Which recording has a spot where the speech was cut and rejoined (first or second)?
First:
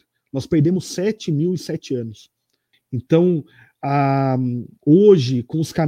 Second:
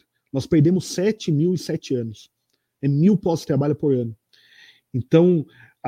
first